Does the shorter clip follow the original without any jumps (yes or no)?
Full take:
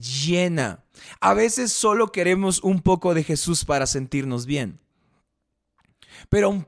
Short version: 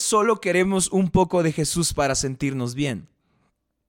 yes